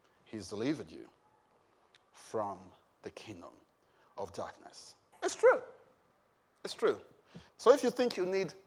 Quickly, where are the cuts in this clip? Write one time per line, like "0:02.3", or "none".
0:05.1
0:07.5